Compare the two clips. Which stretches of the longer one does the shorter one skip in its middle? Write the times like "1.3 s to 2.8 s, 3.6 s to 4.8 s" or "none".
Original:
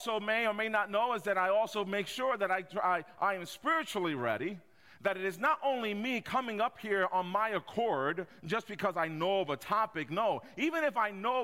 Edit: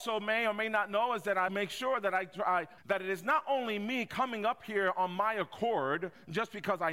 1.5 s to 1.8 s, 3.1 s to 4.9 s